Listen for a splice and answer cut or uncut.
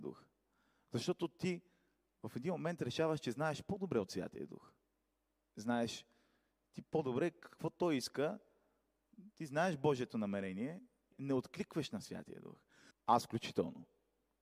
cut